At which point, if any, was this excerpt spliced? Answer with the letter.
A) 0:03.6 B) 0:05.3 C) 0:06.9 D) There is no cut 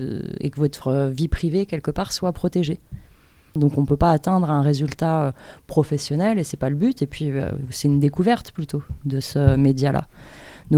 A